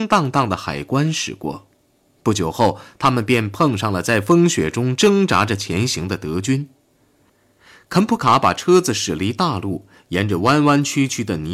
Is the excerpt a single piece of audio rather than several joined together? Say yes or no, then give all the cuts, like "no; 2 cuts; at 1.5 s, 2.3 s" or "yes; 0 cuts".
yes; 0 cuts